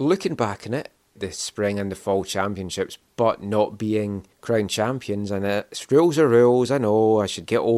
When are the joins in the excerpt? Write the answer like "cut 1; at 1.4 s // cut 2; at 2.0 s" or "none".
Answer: cut 1; at 1.2 s